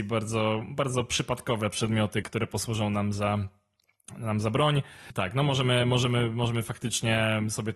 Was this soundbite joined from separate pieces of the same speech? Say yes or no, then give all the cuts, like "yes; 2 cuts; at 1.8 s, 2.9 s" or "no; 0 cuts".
yes; 1 cut; at 2.2 s